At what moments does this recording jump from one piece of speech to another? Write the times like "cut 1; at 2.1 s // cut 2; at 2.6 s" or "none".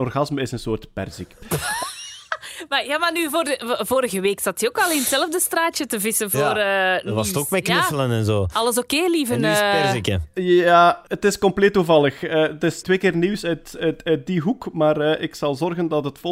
cut 1; at 12.8 s